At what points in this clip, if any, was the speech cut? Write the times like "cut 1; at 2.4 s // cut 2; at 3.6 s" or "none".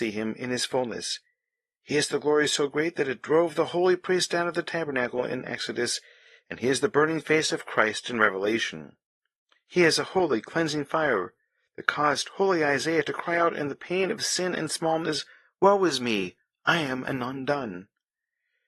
none